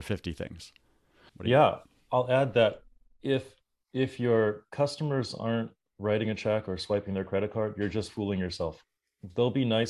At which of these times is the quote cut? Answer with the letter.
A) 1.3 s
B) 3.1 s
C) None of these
A